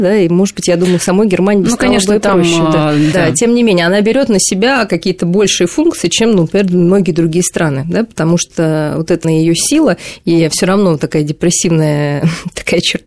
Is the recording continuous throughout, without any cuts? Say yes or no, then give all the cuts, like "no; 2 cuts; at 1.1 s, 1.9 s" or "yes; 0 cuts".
no; 2 cuts; at 3.1 s, 9.2 s